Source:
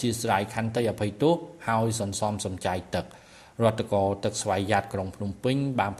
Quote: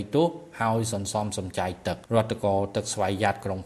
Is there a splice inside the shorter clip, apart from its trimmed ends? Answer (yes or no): yes